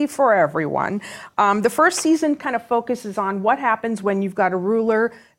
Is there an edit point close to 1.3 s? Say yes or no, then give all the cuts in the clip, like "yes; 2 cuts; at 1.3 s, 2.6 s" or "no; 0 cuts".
no; 0 cuts